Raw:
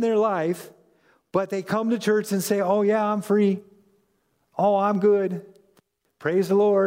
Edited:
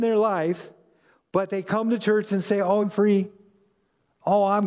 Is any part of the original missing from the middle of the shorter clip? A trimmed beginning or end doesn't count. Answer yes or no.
yes